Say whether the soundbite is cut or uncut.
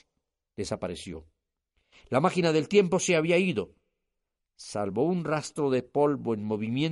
uncut